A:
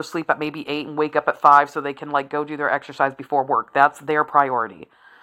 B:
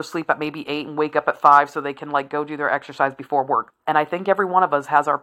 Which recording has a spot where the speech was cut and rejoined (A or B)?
B